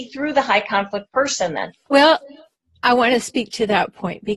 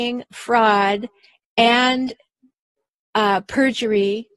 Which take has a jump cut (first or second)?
first